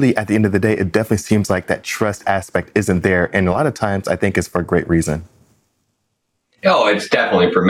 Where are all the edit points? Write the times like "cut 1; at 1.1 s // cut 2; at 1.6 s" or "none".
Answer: none